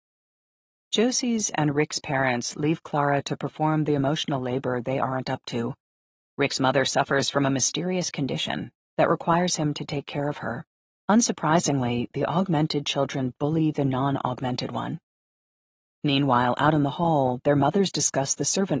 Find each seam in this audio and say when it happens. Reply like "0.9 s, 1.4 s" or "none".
8.8 s, 10.9 s